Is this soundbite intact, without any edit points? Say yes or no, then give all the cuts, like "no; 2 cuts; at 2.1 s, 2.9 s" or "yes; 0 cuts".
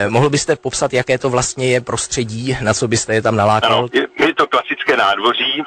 no; 1 cut; at 3.9 s